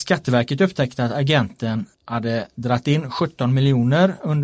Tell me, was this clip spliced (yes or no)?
yes